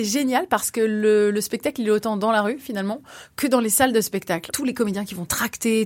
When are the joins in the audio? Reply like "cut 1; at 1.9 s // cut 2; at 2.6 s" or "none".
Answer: none